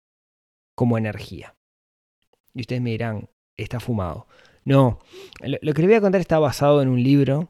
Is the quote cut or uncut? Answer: uncut